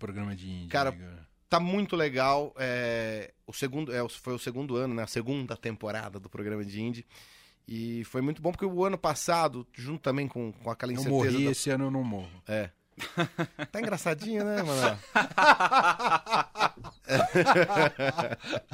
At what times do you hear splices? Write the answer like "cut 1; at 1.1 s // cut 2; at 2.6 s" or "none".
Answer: none